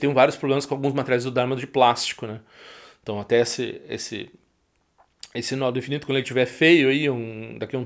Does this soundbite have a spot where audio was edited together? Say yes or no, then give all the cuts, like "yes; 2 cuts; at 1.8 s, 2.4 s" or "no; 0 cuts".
no; 0 cuts